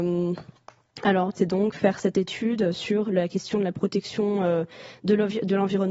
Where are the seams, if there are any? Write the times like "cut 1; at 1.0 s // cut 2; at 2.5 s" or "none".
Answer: cut 1; at 1.3 s